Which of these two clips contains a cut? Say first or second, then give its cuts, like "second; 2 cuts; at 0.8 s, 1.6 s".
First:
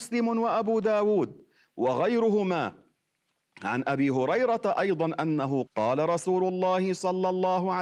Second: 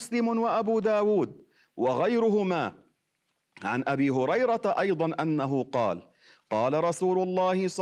first; 1 cut; at 5.7 s